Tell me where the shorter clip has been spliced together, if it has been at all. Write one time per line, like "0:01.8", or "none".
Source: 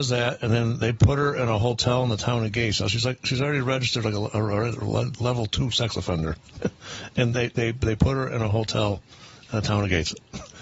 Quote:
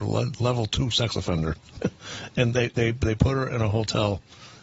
none